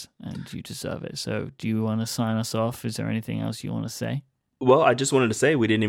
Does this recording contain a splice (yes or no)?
no